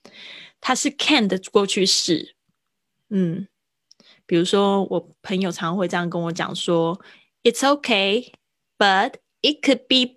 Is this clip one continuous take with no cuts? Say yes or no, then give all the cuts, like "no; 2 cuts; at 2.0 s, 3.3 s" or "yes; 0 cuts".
yes; 0 cuts